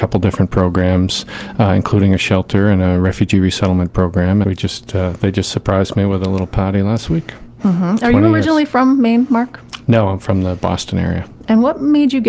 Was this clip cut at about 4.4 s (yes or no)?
yes